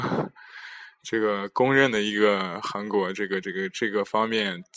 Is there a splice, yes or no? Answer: no